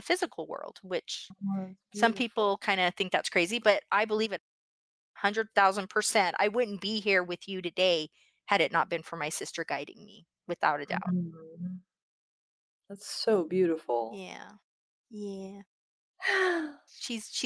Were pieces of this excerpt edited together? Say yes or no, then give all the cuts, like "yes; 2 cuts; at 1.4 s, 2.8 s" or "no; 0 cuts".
yes; 1 cut; at 15.0 s